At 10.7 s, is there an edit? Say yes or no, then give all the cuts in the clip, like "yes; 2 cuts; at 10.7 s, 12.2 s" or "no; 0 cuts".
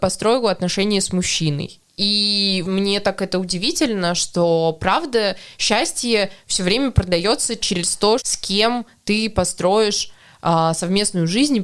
no; 2 cuts; at 2.6 s, 8.2 s